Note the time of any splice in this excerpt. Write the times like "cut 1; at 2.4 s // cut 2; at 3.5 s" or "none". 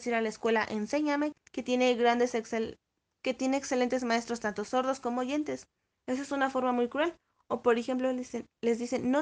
cut 1; at 1.3 s // cut 2; at 5.9 s